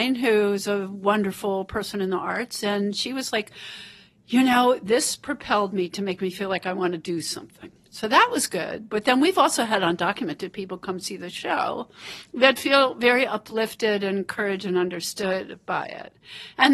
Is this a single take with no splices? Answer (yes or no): yes